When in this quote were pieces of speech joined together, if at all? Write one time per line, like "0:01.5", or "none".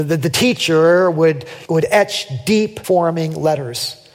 0:01.7
0:02.8